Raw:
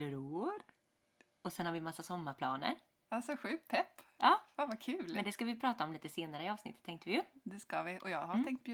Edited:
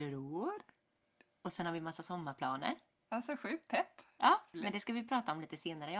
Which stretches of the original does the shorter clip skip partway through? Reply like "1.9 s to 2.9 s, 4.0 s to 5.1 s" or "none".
4.5 s to 5.1 s